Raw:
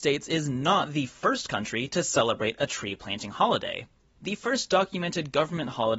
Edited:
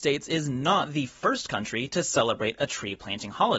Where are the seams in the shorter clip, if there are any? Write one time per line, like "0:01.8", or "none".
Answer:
none